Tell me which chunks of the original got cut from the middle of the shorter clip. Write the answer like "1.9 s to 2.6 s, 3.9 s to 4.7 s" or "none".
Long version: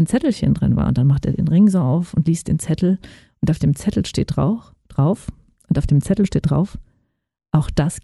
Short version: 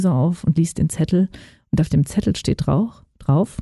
none